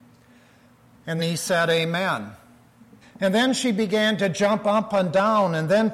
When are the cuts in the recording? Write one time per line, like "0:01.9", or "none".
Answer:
0:01.2
0:03.0